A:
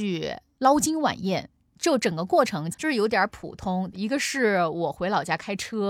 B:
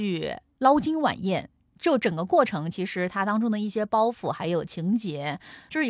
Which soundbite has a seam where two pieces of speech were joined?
A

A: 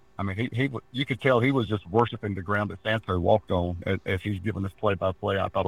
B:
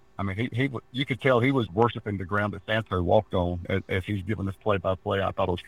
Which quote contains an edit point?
B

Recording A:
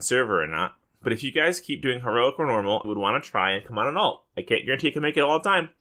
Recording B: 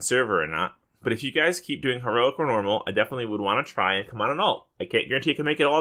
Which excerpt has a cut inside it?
A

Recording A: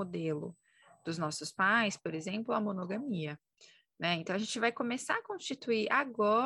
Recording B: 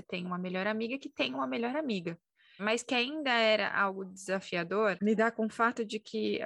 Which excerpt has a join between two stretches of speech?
B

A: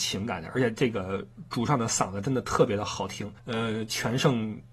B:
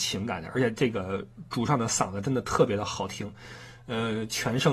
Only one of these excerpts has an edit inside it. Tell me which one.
A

